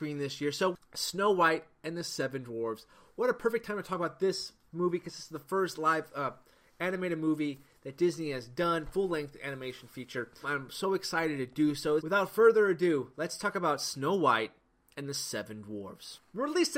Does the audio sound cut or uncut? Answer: cut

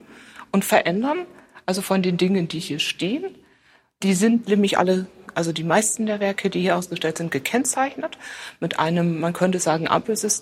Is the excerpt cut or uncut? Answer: uncut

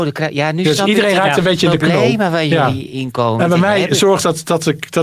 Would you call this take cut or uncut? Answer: uncut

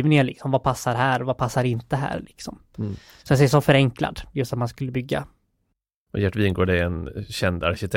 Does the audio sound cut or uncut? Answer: uncut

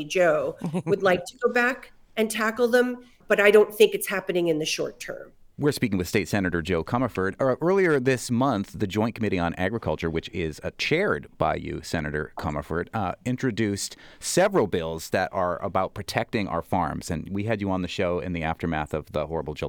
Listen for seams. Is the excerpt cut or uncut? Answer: uncut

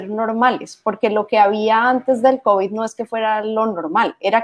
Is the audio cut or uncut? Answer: uncut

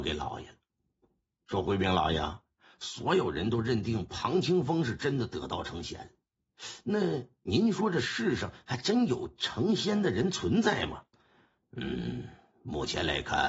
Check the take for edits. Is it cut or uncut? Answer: cut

